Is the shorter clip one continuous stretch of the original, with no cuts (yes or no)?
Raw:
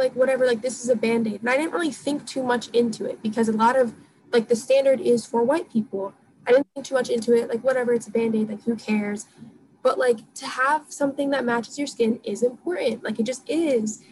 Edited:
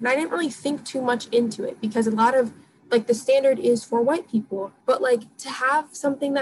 no